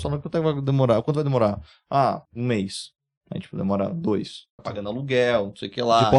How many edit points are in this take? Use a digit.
2